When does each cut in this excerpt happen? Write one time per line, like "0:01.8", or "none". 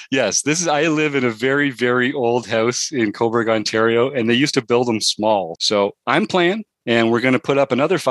0:05.5
0:06.7